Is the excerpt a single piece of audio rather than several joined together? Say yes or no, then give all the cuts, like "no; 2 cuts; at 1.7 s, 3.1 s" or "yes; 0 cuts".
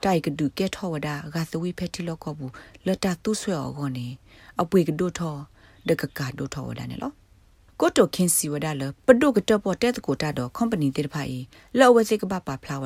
yes; 0 cuts